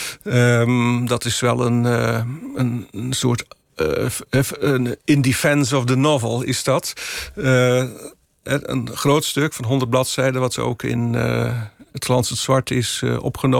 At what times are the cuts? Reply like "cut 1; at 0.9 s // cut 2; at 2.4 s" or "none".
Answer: none